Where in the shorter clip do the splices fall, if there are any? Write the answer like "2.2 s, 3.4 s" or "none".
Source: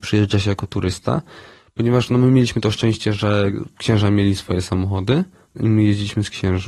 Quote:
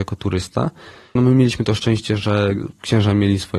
1.2 s